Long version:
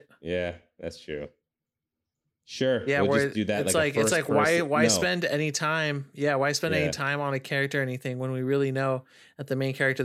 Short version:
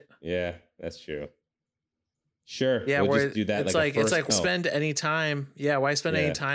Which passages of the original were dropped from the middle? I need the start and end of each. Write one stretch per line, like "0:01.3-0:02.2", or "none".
0:04.3-0:04.9